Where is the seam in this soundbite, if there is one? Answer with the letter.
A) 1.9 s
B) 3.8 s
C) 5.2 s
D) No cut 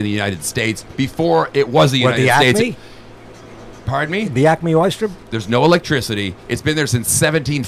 C